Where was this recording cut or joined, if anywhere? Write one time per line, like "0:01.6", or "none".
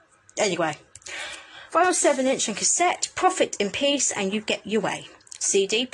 none

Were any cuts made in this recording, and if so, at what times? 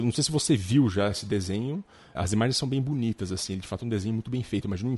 0:02.1

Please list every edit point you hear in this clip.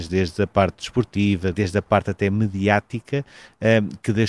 0:01.5

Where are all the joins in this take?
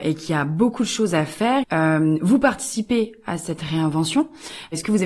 0:01.6

